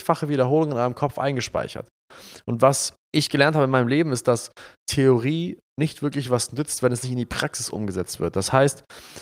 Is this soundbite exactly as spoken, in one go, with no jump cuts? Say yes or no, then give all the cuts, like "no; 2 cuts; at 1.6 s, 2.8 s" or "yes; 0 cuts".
no; 1 cut; at 5.7 s